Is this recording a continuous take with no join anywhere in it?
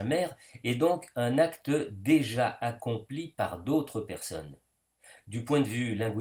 yes; 0 cuts

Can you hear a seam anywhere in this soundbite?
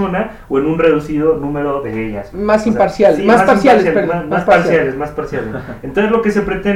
yes; 1 cut; at 2.3 s

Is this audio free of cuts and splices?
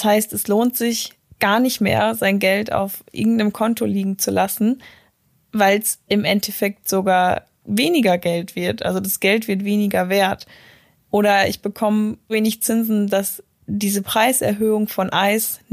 no; 2 cuts; at 11.1 s, 12.3 s

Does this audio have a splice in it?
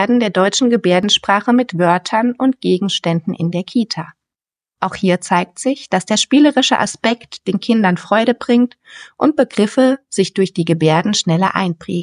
no; 0 cuts

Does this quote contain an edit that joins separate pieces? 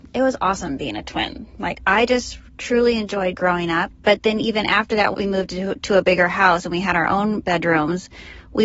yes; 2 cuts; at 3.9 s, 5.1 s

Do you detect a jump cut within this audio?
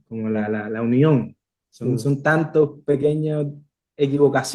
no; 0 cuts

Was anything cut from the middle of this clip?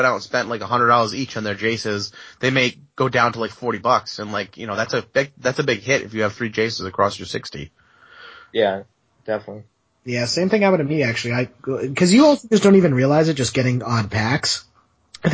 no; 0 cuts

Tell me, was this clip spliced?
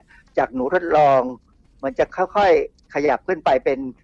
no; 0 cuts

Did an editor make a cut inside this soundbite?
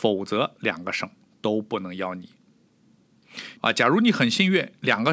yes; 1 cut; at 3.6 s

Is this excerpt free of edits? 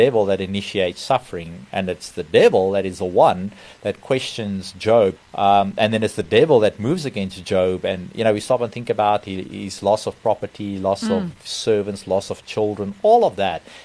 no; 1 cut; at 5.2 s

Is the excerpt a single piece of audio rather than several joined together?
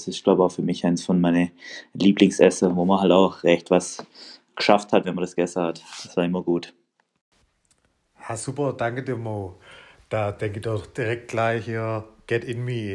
yes; 0 cuts

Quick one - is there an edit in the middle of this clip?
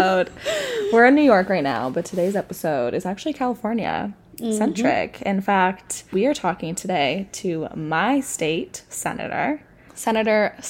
no; 0 cuts

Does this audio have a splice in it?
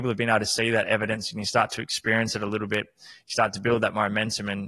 no; 0 cuts

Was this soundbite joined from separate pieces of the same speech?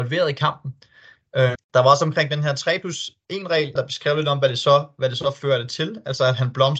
yes; 2 cuts; at 1.5 s, 3.8 s

